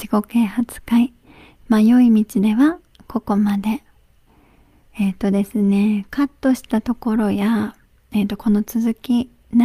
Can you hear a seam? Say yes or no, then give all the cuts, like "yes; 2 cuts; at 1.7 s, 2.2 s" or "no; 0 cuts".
no; 0 cuts